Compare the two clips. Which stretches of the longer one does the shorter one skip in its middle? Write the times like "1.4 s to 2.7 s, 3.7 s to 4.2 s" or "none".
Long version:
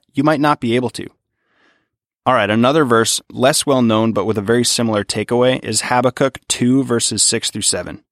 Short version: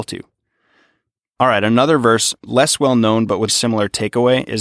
4.3 s to 4.6 s

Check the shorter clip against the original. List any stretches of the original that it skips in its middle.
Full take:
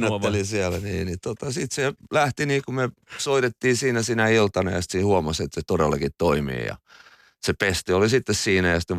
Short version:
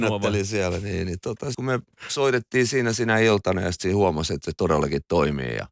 1.5 s to 2.6 s

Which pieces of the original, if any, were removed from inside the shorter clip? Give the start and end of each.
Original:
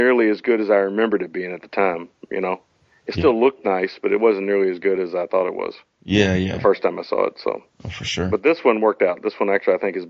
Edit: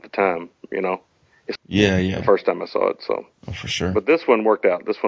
3.1 s to 5.9 s

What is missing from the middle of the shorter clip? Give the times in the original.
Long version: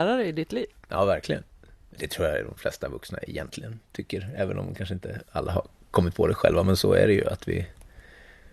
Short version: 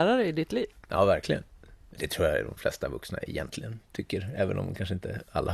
none

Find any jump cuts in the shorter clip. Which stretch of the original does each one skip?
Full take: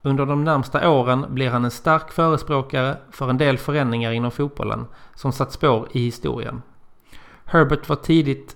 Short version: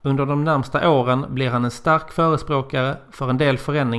none

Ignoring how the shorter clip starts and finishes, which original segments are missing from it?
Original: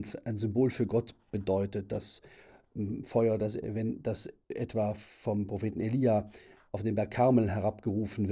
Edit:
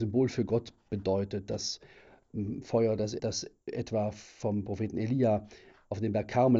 3.6 s to 4.0 s

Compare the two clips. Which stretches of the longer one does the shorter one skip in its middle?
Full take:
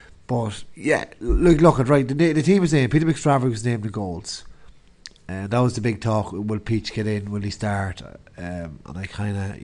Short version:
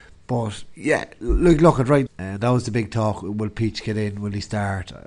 2.1 s to 5.2 s

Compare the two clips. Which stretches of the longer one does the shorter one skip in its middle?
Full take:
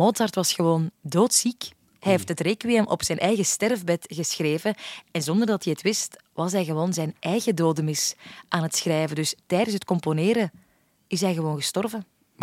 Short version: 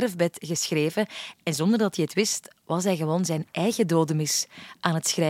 none

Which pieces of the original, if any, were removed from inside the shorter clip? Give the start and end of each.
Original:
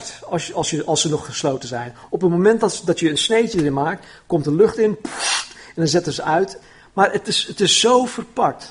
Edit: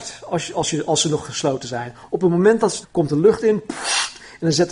2.8 s to 4.2 s

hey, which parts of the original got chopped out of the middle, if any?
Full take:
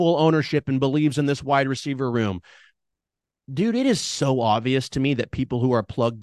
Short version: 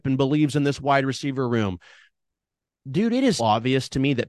4.0 s to 4.4 s

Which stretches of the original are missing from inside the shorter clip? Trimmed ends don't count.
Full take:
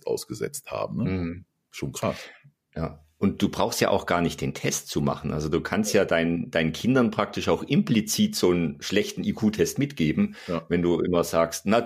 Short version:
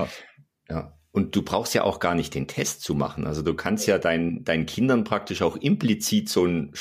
none

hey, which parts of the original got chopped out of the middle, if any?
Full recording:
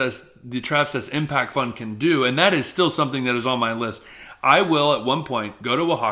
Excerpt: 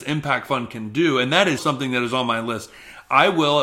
2.6 s to 2.9 s

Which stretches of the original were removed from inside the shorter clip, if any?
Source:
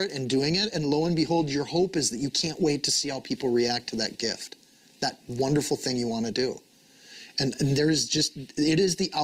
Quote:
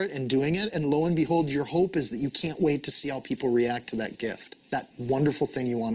4.6 s to 4.9 s

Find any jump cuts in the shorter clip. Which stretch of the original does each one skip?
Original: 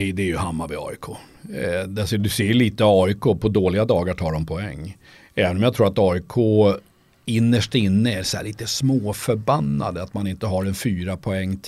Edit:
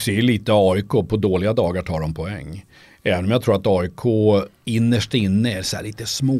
6.8 s to 7.1 s

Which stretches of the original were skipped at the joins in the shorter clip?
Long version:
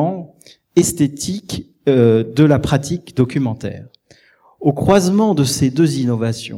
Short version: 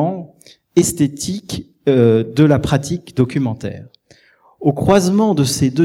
none

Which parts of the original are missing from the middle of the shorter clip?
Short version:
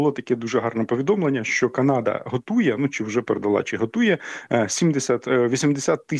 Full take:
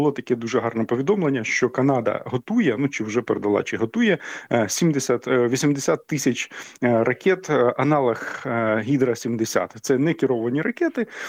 none

